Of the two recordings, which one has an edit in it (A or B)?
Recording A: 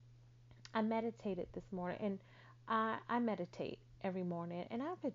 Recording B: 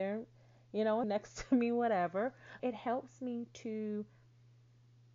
B